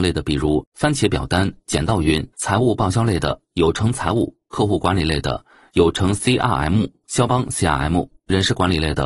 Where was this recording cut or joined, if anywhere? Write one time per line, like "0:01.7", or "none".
0:02.3
0:07.3